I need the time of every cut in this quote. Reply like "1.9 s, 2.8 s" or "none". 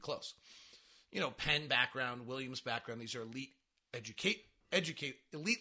none